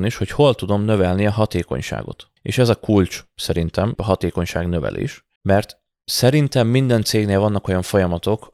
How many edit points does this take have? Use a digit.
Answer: 3